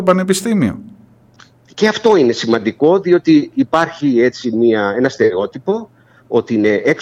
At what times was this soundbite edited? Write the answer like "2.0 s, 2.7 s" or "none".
none